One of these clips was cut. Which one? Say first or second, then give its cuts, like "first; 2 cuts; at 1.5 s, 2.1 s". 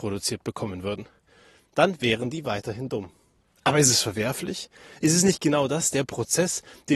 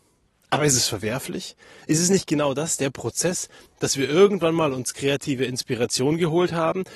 second; 1 cut; at 3.7 s